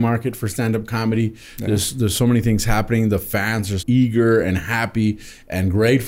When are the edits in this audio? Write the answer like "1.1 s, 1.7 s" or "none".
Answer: 3.8 s